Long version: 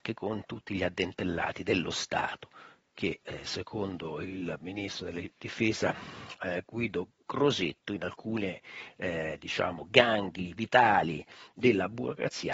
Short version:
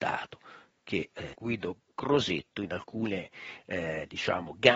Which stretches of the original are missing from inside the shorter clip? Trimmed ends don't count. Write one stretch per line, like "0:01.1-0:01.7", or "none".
0:03.4-0:06.6